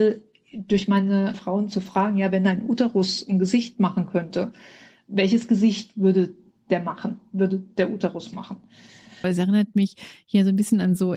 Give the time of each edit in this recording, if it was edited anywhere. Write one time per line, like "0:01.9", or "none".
0:01.3
0:09.2

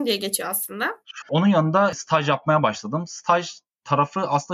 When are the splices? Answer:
0:01.2

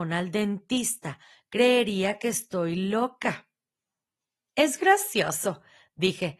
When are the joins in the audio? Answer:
none

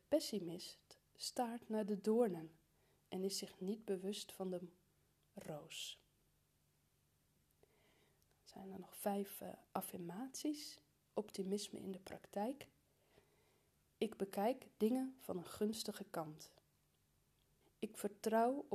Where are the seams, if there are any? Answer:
0:17.6

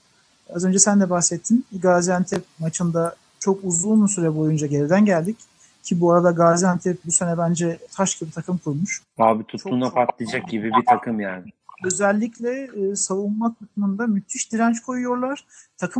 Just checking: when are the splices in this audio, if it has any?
none

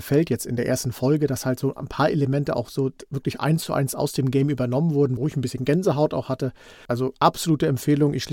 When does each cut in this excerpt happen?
0:05.2
0:06.9

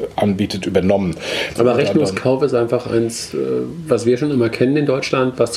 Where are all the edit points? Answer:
0:01.6

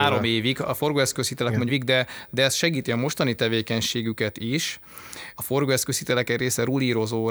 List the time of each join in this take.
0:01.7
0:05.3

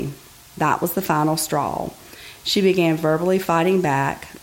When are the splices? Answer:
none

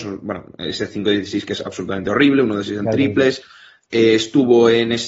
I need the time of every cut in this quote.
none

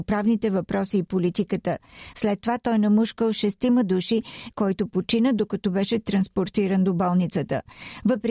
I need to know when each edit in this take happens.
0:02.1
0:04.5

